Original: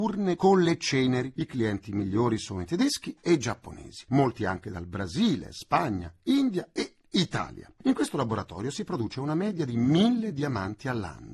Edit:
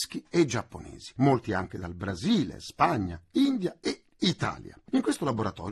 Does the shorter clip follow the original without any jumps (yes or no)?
yes